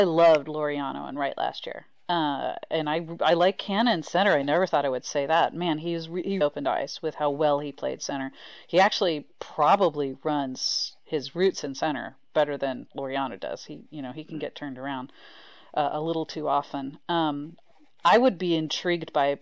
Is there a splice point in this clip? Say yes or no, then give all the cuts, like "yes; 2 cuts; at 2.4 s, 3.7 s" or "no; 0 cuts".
yes; 1 cut; at 6.4 s